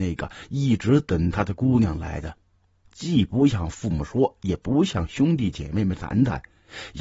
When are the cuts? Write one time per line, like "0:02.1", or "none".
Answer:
0:02.8